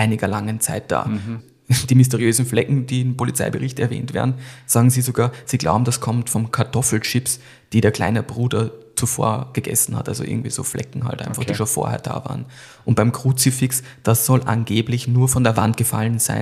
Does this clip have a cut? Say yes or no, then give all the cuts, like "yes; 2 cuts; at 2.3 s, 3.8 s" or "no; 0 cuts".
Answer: no; 0 cuts